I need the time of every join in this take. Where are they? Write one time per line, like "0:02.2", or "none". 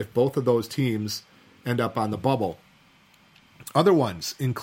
none